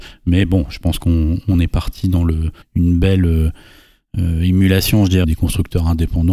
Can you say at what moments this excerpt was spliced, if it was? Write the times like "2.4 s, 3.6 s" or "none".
2.6 s, 5.2 s